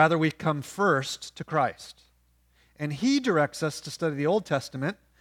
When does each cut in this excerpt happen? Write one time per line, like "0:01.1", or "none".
none